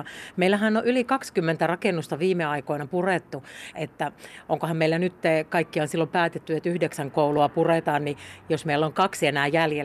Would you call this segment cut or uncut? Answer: cut